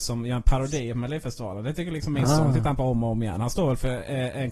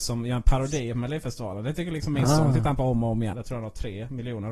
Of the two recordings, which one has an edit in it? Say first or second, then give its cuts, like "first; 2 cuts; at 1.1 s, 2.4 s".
second; 1 cut; at 3.3 s